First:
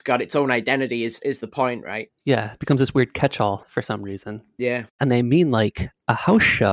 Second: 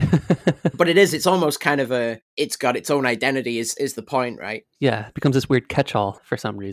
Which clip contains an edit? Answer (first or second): first